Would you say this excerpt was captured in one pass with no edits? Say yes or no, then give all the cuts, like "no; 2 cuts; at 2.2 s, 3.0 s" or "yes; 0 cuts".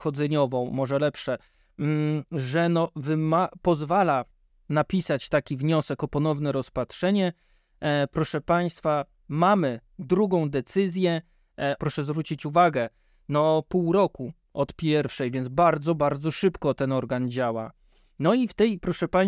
no; 1 cut; at 11.8 s